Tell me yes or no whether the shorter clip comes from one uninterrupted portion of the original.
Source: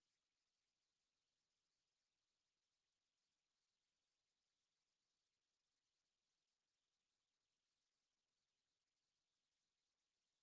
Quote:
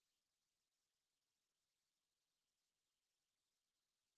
yes